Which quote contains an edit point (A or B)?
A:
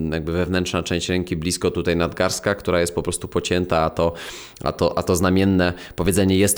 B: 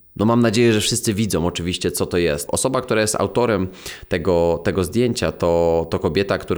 B